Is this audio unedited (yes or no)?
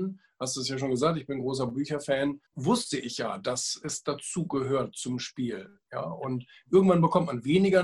no